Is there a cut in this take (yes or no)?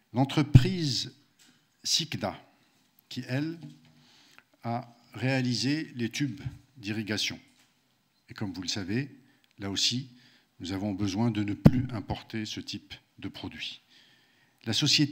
no